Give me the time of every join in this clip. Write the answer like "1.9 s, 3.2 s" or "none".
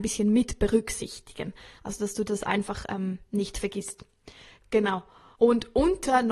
5.4 s